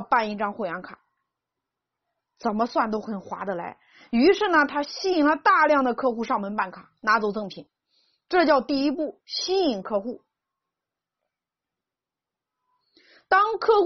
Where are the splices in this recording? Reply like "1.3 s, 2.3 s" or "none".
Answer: none

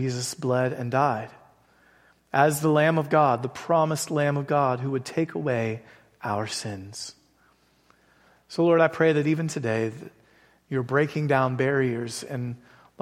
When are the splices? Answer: none

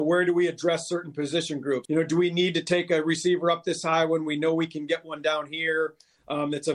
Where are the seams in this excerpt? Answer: 1.9 s

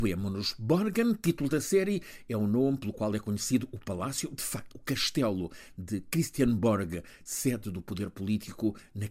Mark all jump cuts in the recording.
none

